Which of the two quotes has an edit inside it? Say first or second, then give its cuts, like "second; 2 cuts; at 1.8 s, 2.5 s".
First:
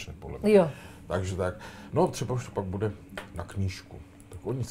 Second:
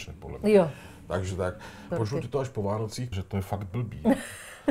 second; 2 cuts; at 1.9 s, 3.1 s